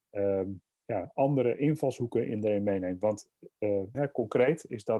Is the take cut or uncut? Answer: cut